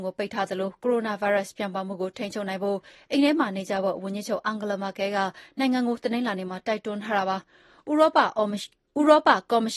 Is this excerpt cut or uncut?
cut